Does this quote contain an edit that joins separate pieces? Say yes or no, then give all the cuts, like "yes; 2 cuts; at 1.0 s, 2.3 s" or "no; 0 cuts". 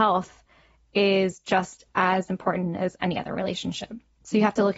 no; 0 cuts